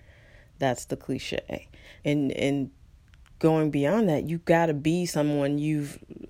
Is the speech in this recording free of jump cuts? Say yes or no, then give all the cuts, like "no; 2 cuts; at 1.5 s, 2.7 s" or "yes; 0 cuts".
no; 1 cut; at 2.0 s